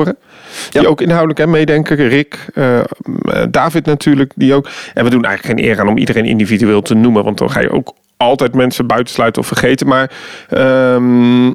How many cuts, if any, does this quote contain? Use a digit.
0